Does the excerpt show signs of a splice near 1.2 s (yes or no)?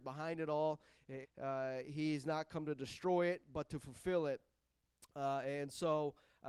yes